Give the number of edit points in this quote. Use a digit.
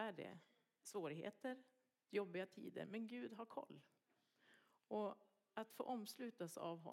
1